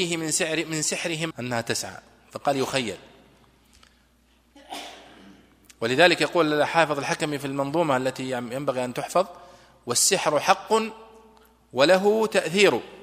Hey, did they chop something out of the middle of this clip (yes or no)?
yes